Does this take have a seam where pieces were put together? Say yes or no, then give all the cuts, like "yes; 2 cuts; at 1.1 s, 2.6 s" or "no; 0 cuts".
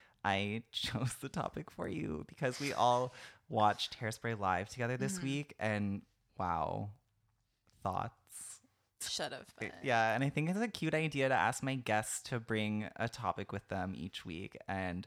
yes; 2 cuts; at 6.3 s, 9.0 s